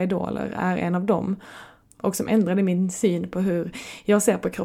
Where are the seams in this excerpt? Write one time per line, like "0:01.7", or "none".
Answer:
0:01.8